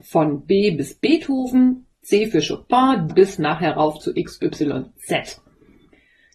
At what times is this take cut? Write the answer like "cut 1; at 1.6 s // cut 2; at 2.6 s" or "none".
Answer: cut 1; at 3.1 s